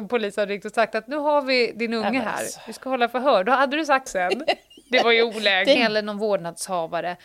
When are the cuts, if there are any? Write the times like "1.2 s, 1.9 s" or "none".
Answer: 4.1 s, 5.8 s